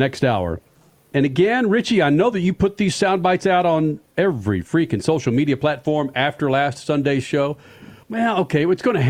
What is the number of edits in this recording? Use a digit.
2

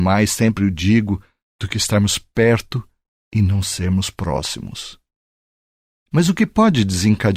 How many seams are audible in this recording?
0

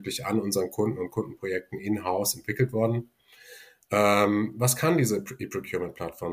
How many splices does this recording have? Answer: 0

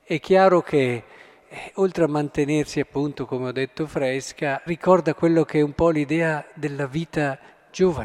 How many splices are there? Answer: 1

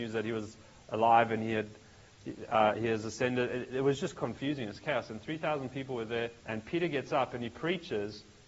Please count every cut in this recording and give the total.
1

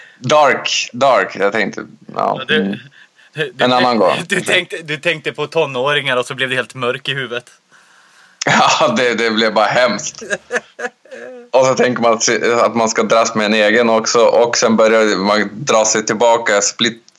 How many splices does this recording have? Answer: 0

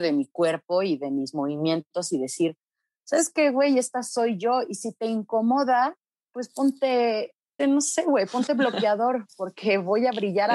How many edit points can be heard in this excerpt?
2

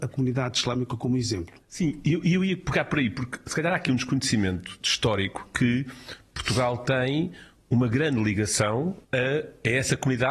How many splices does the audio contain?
2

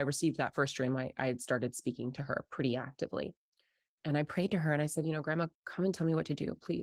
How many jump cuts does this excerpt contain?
0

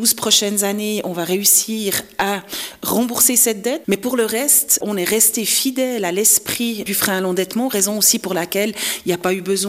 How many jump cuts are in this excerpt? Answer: 1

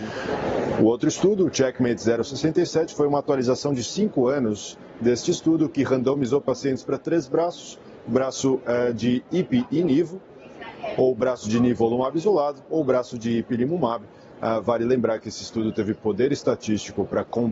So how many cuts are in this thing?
0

